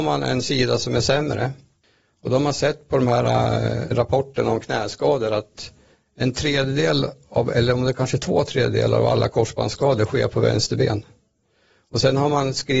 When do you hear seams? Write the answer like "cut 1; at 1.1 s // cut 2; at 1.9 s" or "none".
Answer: cut 1; at 3.9 s